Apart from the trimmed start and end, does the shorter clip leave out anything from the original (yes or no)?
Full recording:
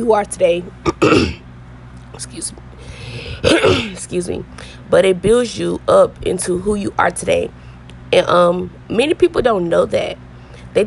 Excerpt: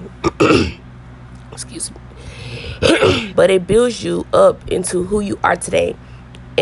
yes